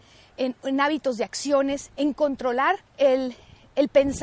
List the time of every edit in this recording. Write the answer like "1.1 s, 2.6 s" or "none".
2.9 s